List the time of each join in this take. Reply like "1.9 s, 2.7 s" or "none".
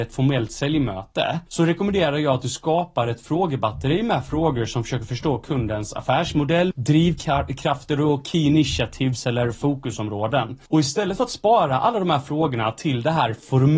6.7 s